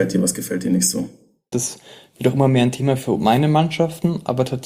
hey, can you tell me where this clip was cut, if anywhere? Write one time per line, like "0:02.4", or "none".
0:01.5